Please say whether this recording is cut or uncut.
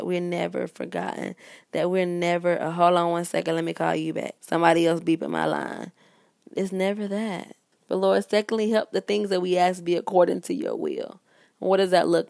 cut